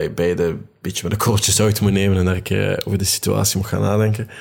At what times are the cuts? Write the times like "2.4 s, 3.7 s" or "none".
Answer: none